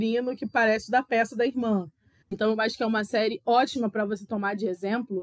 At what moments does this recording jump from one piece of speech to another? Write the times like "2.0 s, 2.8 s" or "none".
2.2 s